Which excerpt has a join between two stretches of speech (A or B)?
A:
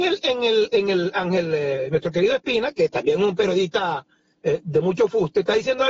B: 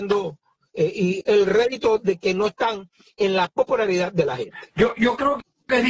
B